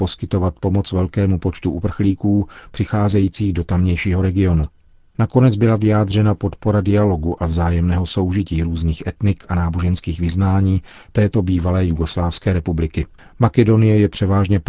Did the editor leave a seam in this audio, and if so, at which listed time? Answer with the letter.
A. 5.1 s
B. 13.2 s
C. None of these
B